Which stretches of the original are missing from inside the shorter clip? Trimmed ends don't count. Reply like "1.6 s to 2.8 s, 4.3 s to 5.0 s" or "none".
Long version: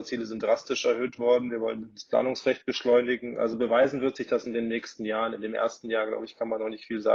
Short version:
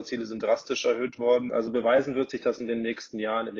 1.5 s to 3.4 s

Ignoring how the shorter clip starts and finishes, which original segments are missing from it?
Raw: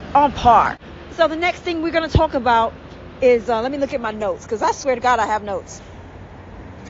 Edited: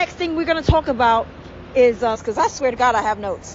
3.6 s to 4.4 s

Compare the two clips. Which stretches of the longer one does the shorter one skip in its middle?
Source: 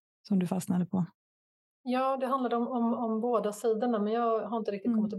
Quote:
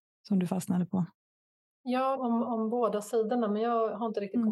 2.2 s to 2.7 s

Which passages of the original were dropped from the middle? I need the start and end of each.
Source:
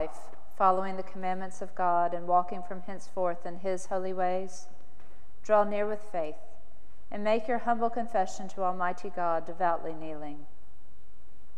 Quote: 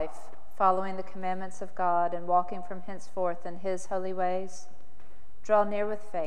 none

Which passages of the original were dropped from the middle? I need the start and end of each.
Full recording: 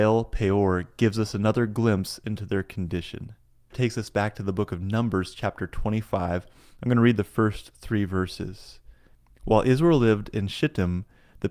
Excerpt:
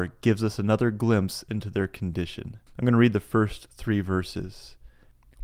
3.4 s to 6.7 s

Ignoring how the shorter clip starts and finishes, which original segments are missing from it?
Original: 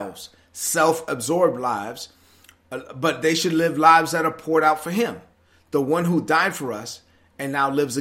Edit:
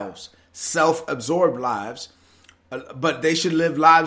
none

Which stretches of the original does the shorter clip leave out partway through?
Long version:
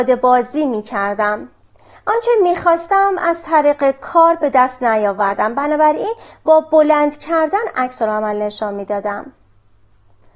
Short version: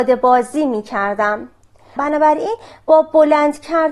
2.0 s to 5.5 s

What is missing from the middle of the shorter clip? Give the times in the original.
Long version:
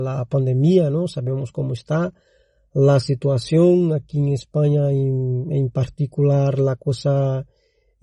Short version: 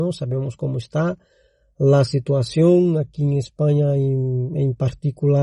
none

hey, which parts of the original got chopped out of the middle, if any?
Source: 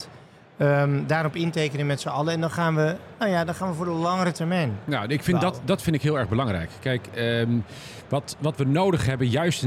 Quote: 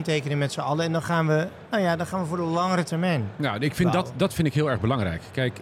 none

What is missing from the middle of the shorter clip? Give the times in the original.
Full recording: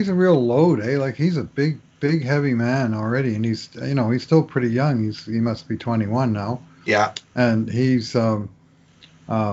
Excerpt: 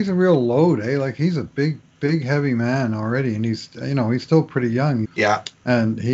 5.0 s to 6.7 s

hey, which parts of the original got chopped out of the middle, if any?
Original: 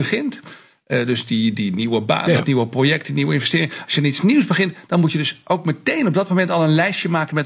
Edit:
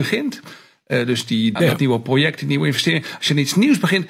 1.6 s to 2.2 s

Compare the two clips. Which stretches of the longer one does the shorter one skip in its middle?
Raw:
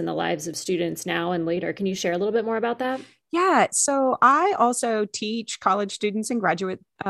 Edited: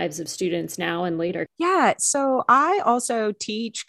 1.7 s to 3.2 s

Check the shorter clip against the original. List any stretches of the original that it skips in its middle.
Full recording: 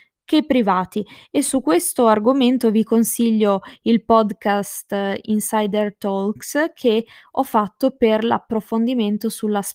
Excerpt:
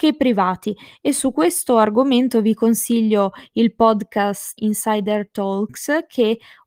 4.9 s to 5.2 s

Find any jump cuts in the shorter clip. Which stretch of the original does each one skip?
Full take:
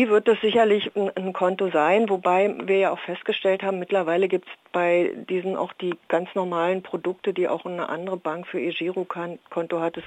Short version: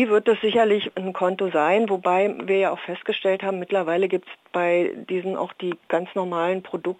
0.9 s to 1.1 s

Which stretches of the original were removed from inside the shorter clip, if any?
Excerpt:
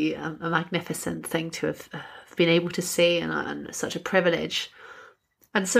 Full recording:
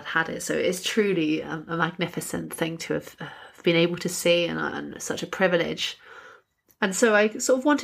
none

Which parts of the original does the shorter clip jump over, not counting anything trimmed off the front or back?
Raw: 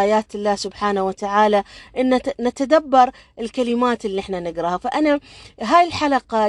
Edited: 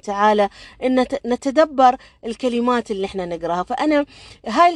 none

